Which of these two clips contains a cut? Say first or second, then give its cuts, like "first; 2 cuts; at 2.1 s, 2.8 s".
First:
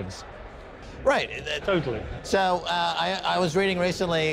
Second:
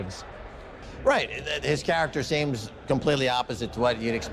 first; 1 cut; at 1.6 s